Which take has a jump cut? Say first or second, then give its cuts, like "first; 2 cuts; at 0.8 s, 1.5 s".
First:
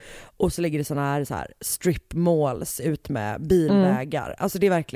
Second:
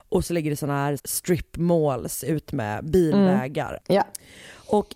second; 2 cuts; at 1.0 s, 3.8 s